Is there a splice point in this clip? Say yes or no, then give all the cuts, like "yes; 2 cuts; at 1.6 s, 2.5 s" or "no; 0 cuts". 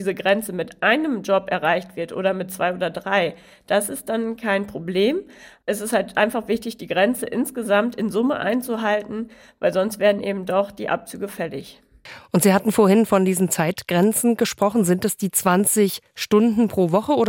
no; 0 cuts